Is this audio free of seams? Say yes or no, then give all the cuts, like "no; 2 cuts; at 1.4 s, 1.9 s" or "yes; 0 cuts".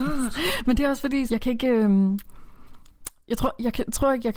no; 1 cut; at 1.3 s